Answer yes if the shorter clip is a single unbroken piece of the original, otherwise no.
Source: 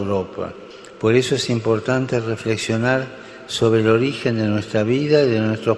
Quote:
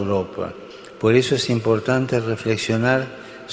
yes